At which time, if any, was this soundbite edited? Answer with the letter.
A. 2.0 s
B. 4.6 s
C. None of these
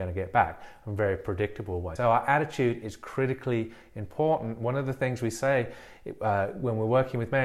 A